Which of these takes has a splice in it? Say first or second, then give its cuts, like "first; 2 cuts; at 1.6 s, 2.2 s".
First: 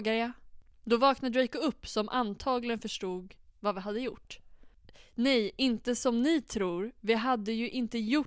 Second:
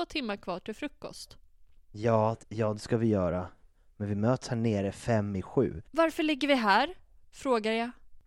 second; 2 cuts; at 2.4 s, 5.9 s